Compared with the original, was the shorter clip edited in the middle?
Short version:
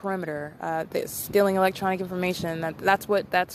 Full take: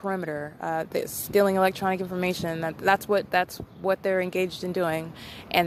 no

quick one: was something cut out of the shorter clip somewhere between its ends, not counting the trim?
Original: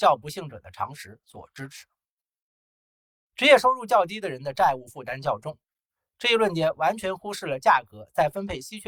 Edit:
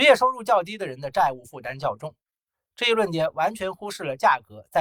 no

